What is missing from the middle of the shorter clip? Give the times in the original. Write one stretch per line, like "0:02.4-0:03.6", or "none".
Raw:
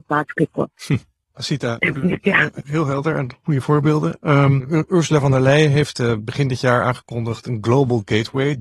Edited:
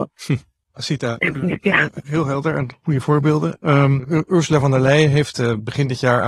none